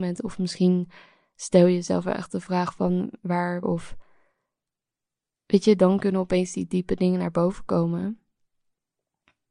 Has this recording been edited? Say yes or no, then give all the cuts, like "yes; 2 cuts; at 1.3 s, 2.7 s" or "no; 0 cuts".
yes; 1 cut; at 3.6 s